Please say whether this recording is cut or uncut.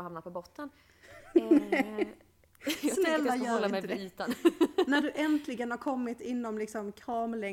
uncut